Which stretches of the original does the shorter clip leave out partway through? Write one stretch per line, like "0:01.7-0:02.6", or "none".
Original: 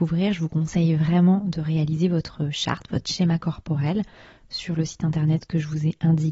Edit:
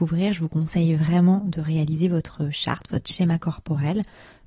none